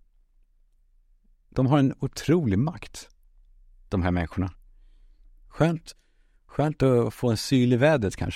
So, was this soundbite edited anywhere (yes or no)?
yes